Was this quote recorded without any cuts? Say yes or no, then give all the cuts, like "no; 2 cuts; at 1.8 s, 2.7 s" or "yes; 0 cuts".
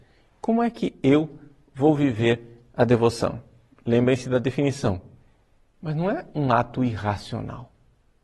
no; 1 cut; at 5.7 s